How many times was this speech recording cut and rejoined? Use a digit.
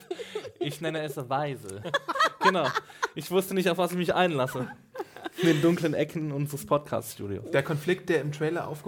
1